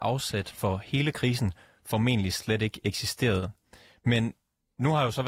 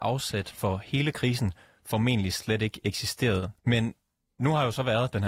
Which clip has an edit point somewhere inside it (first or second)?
second